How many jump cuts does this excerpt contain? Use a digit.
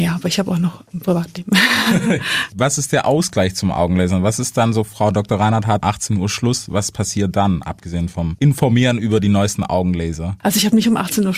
1